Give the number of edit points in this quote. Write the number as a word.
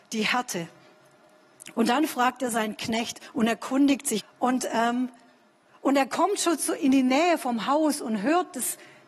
one